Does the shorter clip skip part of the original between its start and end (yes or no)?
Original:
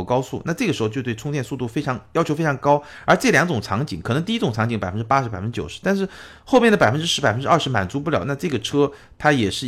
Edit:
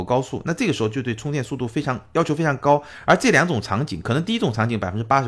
no